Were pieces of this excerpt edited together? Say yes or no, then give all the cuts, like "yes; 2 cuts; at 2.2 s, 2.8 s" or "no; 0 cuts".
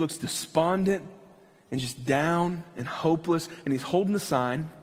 no; 0 cuts